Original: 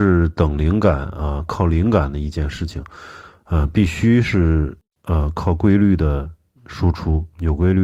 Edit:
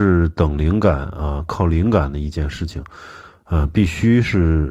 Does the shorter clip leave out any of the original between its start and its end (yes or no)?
no